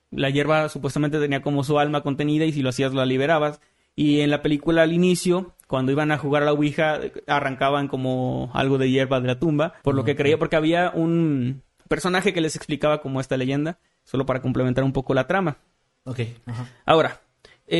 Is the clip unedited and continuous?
no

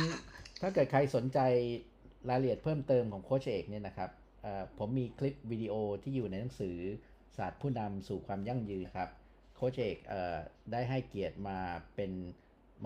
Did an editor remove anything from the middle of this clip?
yes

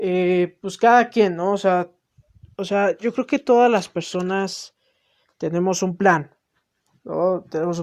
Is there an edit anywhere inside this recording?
no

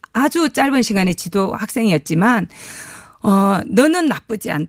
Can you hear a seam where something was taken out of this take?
no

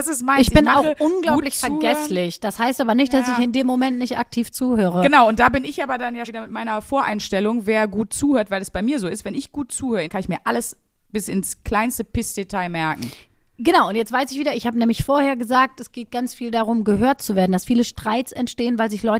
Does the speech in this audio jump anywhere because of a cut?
yes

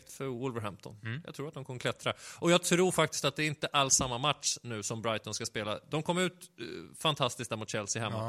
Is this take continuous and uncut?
yes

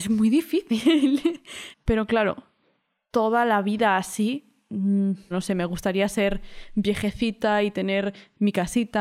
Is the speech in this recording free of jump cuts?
no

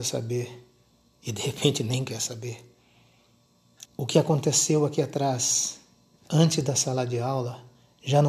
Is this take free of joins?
no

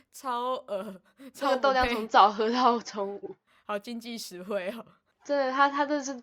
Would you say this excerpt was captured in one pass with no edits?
yes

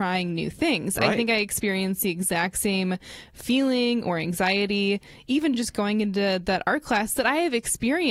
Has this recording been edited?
no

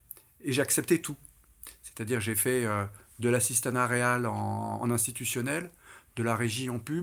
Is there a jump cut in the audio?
no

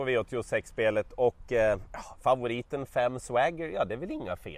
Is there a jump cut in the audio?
no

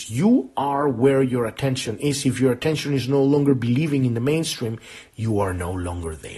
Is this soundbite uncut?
yes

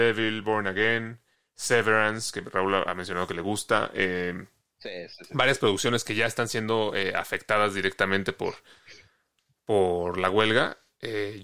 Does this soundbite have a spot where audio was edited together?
no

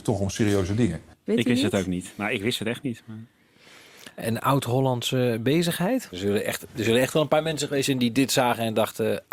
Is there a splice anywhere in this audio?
yes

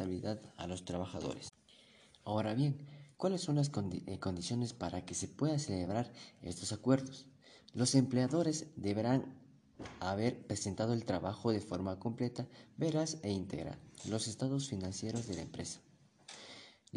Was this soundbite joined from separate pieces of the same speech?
no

